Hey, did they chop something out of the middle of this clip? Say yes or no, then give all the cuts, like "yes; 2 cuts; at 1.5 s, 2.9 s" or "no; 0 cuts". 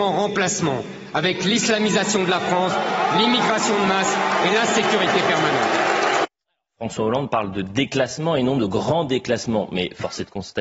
no; 0 cuts